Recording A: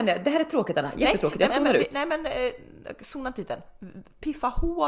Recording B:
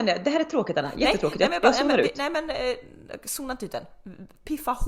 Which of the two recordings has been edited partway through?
A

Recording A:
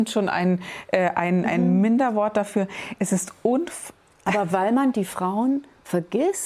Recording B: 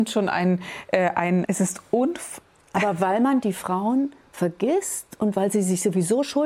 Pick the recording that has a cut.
B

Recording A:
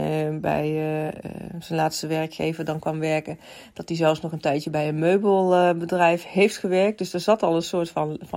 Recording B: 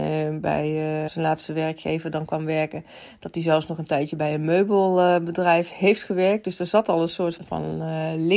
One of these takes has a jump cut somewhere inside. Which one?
B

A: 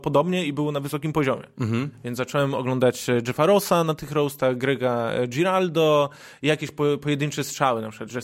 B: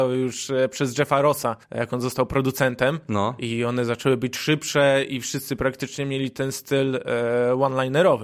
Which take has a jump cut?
B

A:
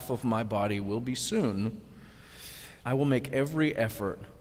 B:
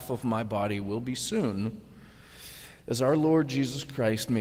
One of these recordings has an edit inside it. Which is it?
A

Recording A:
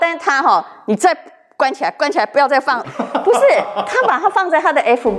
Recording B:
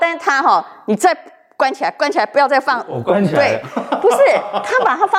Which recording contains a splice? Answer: A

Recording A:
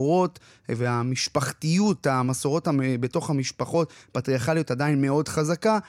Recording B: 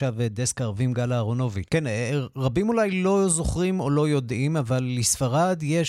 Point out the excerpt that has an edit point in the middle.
B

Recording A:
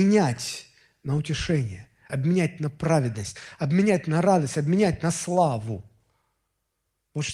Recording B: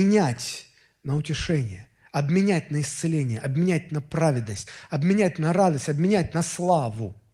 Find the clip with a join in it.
A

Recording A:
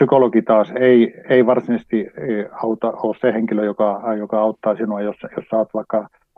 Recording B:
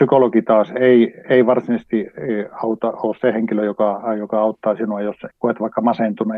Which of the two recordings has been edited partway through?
B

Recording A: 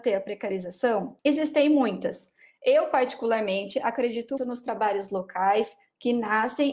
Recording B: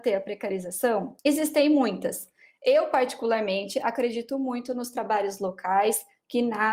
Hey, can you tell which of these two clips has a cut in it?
A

